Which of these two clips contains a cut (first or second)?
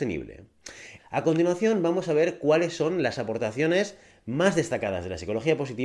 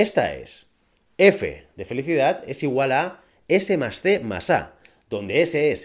first